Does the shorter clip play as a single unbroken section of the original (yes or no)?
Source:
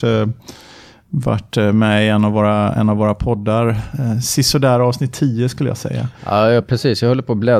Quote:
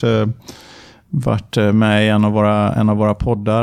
yes